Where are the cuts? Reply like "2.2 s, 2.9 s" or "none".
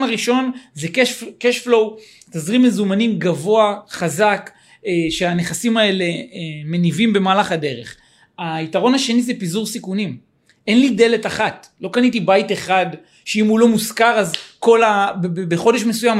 none